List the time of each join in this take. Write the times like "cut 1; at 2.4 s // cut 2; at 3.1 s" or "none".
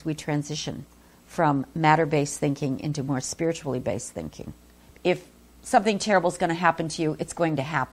cut 1; at 4.9 s